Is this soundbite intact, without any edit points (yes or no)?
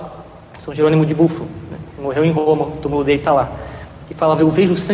yes